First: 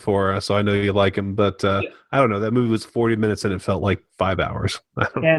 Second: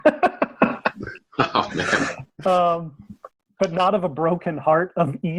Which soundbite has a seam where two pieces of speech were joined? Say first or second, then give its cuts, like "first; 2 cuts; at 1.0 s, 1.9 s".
first; 1 cut; at 4.1 s